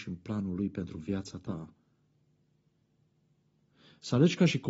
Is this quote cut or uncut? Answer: uncut